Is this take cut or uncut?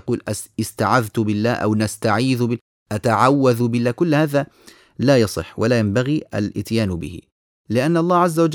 uncut